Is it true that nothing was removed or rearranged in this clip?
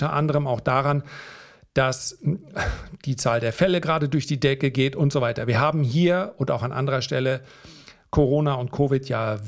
yes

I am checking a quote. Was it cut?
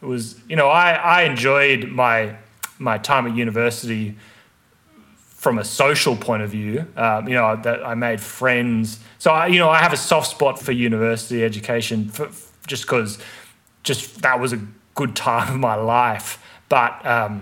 yes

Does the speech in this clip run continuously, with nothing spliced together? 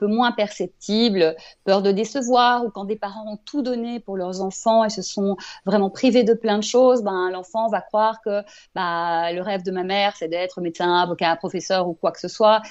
yes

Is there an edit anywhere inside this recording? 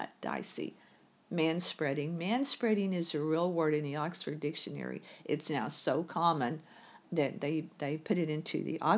no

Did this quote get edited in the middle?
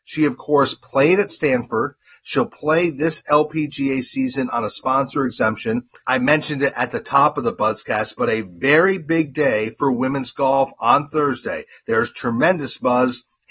yes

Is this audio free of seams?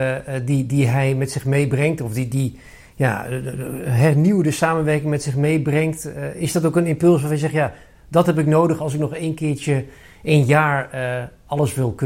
yes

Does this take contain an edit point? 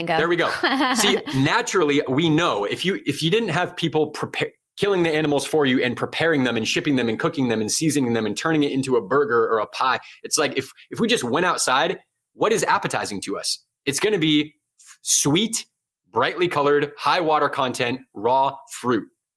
no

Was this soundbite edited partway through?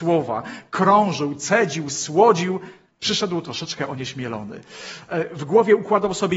yes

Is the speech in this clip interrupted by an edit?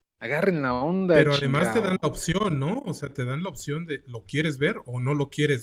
no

